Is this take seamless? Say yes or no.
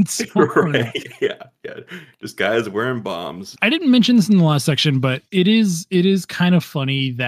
no